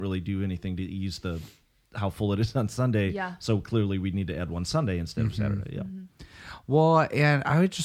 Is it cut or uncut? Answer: uncut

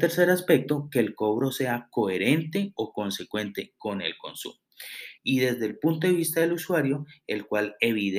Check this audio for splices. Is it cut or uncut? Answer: cut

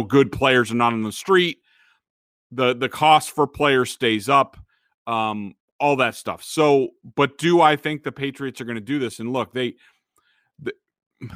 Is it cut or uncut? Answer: uncut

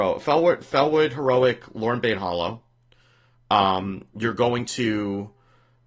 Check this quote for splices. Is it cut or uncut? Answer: uncut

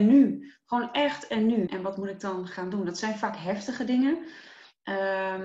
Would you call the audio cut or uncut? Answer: cut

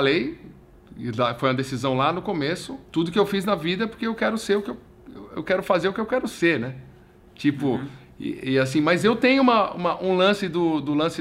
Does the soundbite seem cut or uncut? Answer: cut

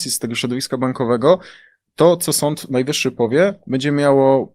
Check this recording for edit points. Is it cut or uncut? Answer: uncut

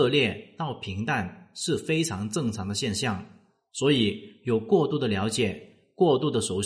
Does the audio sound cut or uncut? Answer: uncut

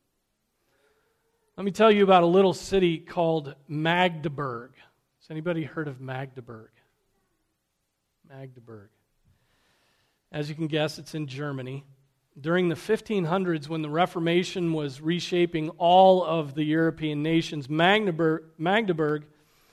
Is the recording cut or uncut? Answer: uncut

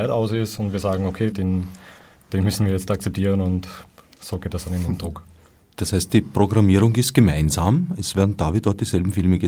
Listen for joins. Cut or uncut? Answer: cut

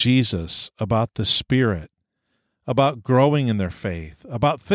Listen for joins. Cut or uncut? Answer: uncut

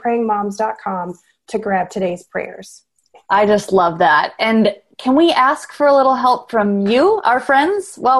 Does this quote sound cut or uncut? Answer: uncut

